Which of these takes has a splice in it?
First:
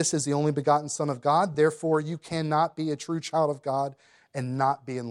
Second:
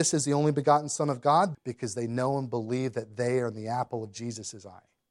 second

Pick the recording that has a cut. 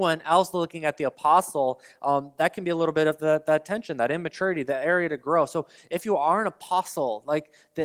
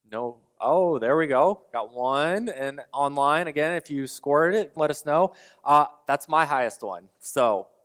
second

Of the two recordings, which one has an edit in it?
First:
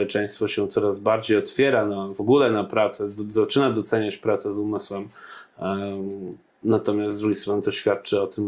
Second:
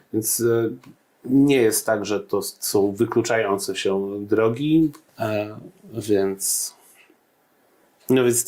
second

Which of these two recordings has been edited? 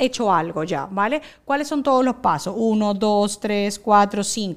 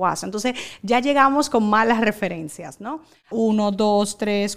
second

